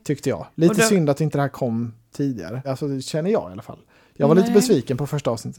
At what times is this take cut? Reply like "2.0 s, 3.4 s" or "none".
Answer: 2.6 s